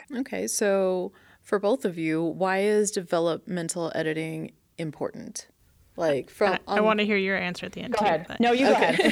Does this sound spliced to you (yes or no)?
no